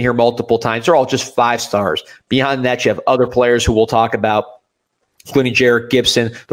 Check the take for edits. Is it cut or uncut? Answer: uncut